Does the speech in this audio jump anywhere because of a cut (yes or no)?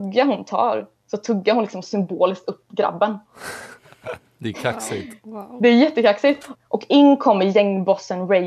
yes